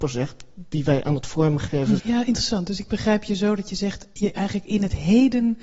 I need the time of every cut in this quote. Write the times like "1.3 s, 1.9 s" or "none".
2.0 s